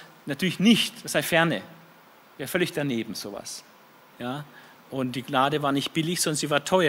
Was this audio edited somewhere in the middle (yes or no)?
yes